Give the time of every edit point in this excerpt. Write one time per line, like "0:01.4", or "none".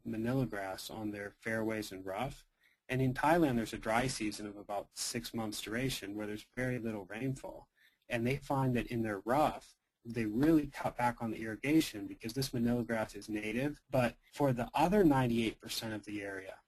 0:13.8